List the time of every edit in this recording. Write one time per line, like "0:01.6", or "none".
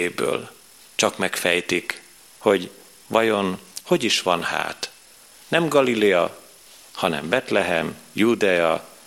0:00.9